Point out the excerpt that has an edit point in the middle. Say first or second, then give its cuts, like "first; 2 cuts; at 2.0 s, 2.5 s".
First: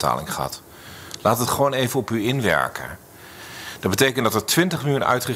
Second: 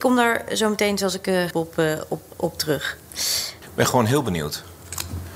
second; 2 cuts; at 1.5 s, 3.6 s